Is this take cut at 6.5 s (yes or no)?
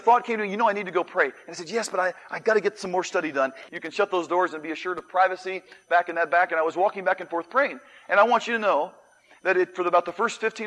no